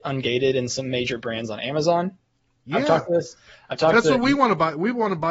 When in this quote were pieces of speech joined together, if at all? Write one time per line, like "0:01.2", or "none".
0:02.6